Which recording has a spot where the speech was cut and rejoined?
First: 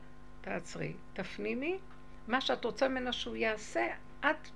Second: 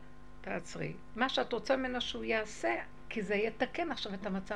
second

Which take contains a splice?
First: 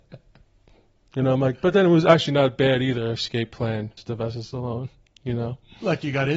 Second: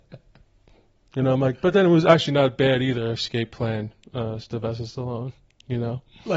first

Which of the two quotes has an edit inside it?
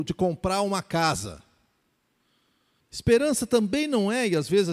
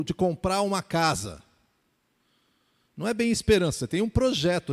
first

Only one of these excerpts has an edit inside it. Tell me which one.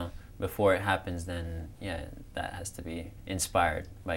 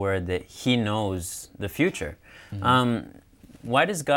first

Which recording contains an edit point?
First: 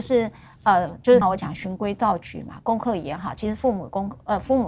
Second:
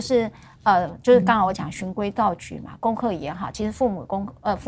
first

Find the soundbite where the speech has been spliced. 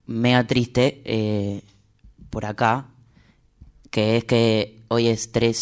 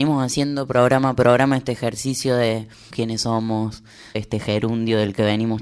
second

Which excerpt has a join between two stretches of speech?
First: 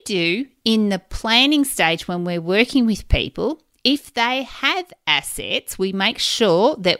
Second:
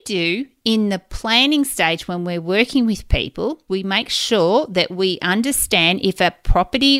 second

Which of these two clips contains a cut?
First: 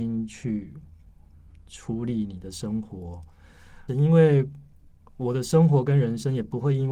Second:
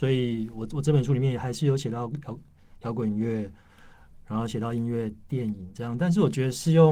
first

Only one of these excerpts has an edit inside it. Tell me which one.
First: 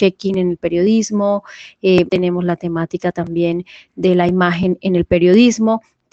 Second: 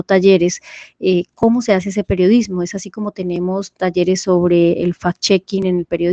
first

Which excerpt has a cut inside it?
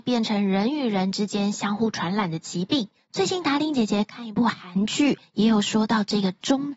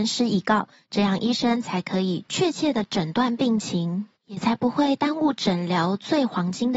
first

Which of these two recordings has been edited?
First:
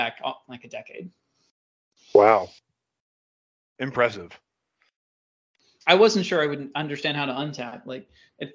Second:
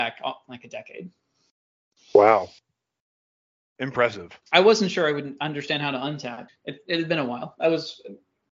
second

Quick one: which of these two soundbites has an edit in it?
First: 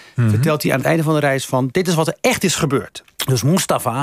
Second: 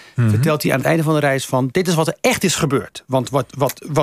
first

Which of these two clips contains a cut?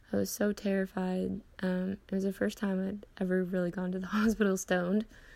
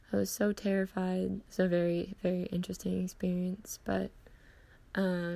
second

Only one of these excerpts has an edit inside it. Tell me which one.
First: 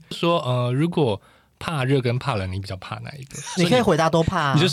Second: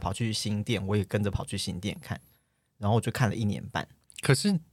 first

